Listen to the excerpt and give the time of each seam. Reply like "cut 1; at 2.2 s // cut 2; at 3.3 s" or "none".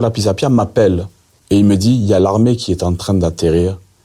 none